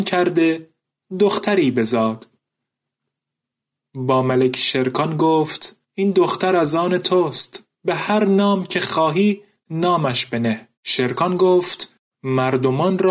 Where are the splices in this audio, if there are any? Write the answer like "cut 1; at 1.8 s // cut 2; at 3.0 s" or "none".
cut 1; at 5.8 s // cut 2; at 7.7 s // cut 3; at 10.8 s